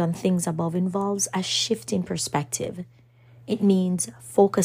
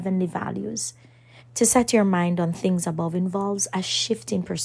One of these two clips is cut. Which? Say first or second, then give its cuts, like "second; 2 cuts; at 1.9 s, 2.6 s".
second; 1 cut; at 1.4 s